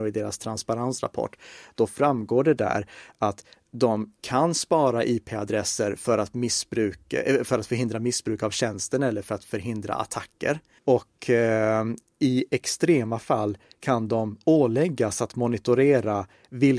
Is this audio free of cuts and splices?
no; 1 cut; at 10.8 s

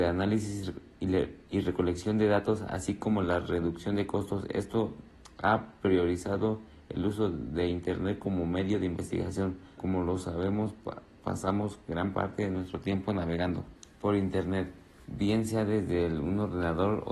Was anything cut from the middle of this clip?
yes; 2 cuts; at 9.8 s, 13.9 s

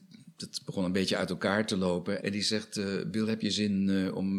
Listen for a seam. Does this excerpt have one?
yes; 1 cut; at 2.2 s

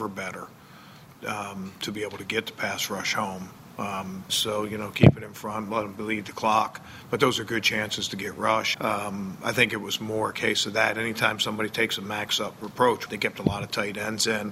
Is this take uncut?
no; 3 cuts; at 4.3 s, 8.7 s, 13.1 s

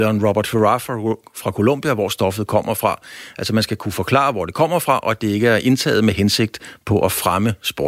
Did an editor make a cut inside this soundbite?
no; 0 cuts

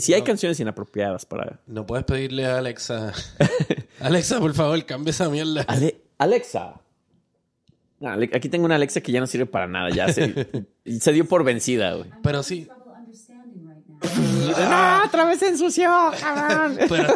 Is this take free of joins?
no; 2 cuts; at 10.9 s, 14.0 s

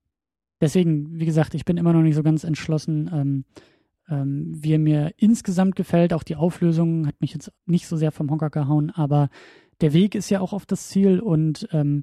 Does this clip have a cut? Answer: yes; 1 cut; at 7.6 s

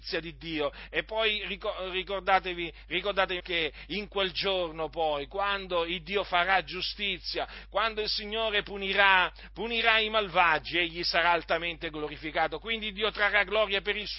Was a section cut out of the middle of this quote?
yes; 1 cut; at 3.4 s

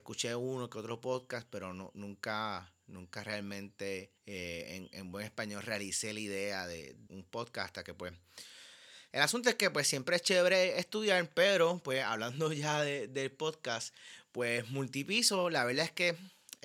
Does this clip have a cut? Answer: yes; 3 cuts; at 4.2 s, 7.1 s, 9.1 s

